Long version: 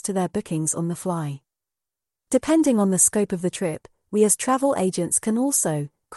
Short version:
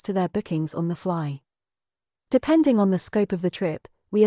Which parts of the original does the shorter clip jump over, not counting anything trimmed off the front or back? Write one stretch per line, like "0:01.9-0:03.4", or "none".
none